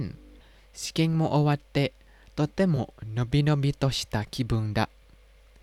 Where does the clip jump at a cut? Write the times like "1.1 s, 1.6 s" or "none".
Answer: none